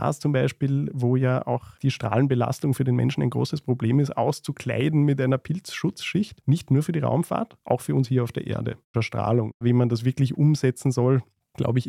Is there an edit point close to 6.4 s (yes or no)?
yes